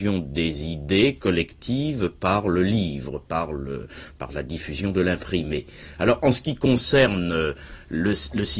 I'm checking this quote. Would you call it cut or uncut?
uncut